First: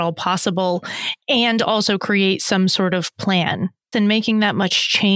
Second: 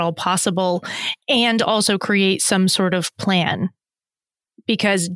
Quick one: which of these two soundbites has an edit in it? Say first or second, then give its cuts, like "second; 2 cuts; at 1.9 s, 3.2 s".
first; 1 cut; at 3.9 s